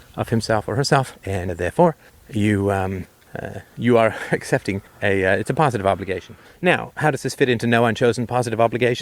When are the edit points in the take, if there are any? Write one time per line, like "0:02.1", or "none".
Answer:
0:06.4